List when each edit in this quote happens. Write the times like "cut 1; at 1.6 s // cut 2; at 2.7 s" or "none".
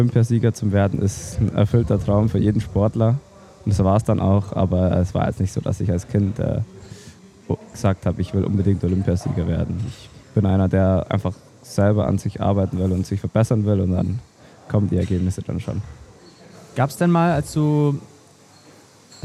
cut 1; at 10.2 s